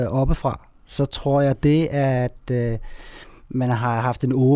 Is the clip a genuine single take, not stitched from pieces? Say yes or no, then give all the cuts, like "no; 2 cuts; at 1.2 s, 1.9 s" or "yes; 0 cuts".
yes; 0 cuts